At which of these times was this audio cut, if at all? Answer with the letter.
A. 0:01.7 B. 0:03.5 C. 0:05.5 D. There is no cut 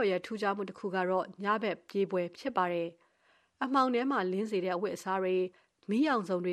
D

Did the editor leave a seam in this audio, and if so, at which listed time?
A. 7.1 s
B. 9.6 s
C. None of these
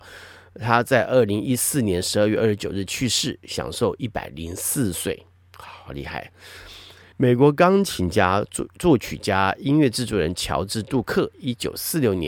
A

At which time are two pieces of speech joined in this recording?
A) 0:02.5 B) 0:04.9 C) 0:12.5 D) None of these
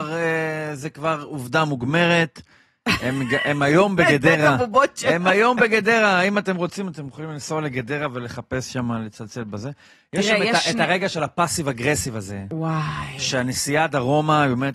D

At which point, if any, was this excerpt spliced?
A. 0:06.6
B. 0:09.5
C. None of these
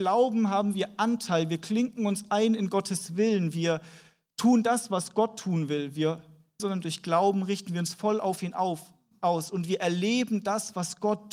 A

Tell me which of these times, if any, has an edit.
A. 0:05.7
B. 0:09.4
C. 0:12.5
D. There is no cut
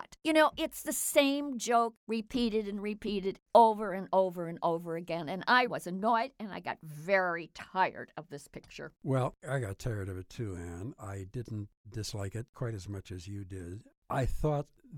A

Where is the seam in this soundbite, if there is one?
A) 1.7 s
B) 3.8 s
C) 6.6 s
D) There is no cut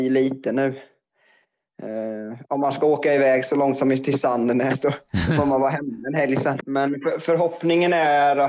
C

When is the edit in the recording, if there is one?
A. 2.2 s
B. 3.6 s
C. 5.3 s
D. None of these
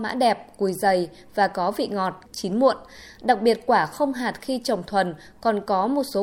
A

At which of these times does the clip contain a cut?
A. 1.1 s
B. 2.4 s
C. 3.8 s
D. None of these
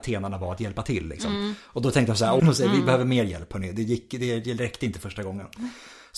B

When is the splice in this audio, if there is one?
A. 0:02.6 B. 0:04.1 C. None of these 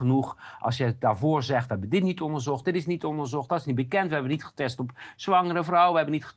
A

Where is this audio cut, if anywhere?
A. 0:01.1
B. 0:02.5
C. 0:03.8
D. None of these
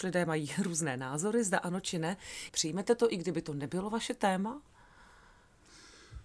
B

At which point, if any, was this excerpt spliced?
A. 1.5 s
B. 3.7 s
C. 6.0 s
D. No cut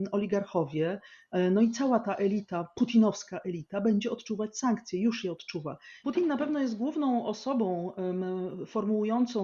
C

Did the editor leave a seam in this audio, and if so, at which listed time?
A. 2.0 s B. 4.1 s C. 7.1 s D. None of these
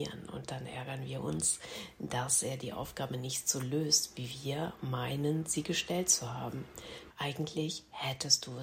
C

